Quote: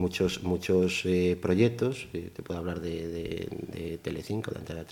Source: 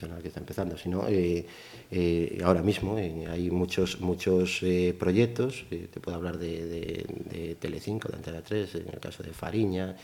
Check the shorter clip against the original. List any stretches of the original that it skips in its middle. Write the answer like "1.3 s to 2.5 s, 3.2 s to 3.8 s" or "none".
none